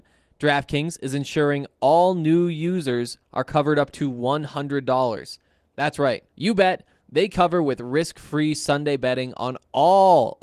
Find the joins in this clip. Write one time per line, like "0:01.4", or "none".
0:06.3